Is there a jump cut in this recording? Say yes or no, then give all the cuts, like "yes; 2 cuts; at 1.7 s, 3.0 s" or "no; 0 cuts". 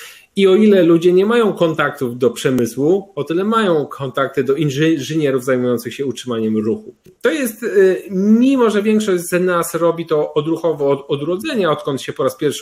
no; 0 cuts